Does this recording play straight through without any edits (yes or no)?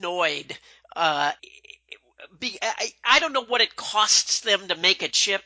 no